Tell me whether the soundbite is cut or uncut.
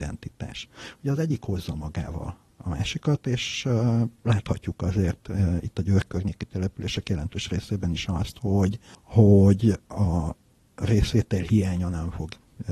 uncut